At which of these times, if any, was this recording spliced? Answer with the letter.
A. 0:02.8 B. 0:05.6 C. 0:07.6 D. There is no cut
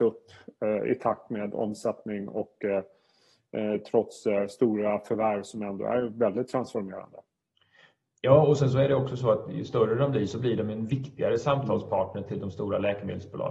D